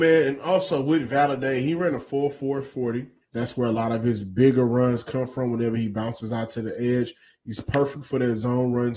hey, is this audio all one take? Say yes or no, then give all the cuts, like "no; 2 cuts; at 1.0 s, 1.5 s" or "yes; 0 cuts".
no; 1 cut; at 3.2 s